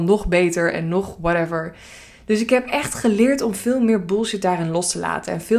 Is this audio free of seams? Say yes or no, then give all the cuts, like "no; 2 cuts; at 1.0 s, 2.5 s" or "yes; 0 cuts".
yes; 0 cuts